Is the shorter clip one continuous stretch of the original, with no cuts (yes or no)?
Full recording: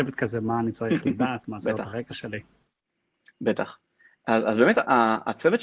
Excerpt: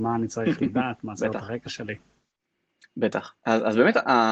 no